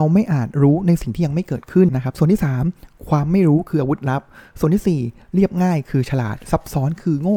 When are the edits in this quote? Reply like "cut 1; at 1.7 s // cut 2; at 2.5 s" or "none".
cut 1; at 1.9 s